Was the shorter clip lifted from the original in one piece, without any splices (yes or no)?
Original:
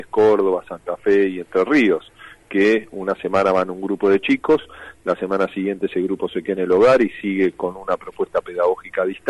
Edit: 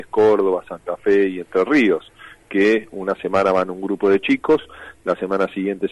yes